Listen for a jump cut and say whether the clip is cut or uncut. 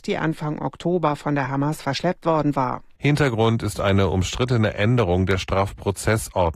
cut